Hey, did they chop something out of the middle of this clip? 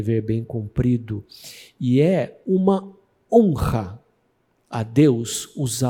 no; 0 cuts

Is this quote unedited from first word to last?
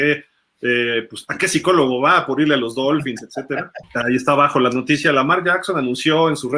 no; 1 cut; at 3.8 s

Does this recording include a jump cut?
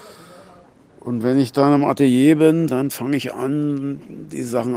yes; 1 cut; at 2.7 s

